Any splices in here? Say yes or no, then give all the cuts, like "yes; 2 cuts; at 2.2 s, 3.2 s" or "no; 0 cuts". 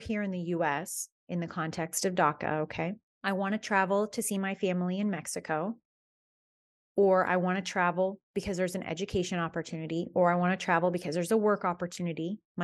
yes; 1 cut; at 3.1 s